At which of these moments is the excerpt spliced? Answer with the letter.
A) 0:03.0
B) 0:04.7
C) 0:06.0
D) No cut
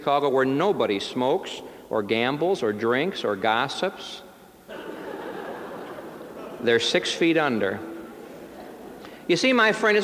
B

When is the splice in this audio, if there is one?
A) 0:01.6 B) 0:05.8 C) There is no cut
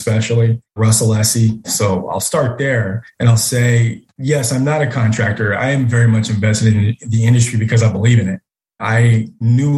A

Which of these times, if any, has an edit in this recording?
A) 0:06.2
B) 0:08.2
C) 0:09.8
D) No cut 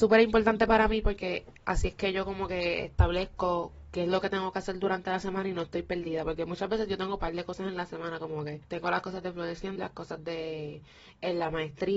C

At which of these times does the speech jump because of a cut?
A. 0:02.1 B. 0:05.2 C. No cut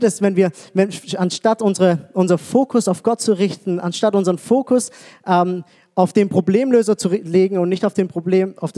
C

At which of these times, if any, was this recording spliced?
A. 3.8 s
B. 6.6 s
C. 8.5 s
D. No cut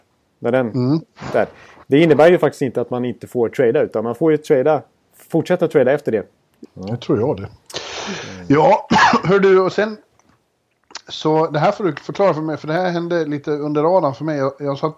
B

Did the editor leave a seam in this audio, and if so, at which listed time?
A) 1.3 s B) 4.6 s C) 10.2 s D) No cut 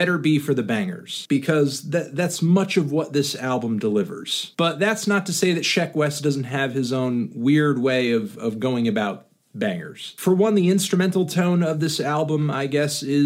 D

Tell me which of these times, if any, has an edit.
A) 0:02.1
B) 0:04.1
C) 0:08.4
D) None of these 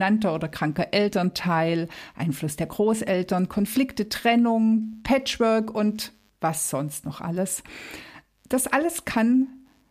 D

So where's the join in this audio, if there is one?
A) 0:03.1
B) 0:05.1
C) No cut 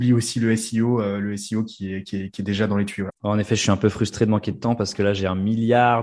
A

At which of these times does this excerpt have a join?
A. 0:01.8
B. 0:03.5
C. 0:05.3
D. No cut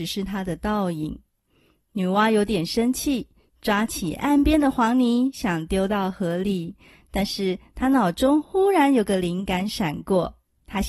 D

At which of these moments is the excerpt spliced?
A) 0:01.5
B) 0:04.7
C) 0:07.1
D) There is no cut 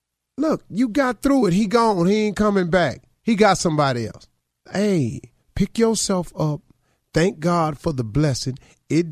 B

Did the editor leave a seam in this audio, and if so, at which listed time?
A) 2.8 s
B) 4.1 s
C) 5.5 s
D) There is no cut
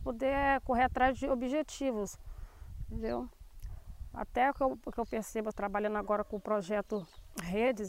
C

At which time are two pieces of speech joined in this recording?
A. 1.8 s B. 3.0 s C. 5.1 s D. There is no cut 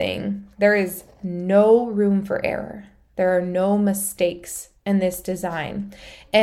D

